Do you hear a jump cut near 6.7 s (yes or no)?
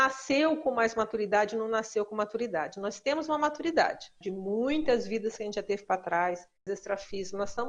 yes